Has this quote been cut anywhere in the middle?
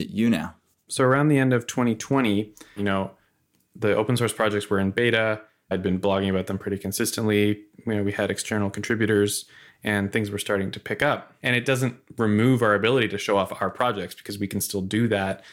yes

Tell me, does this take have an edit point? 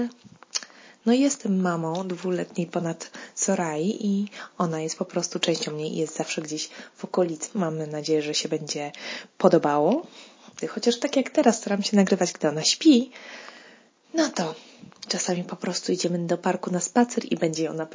yes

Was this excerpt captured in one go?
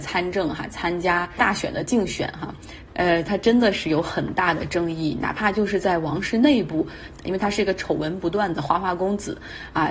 no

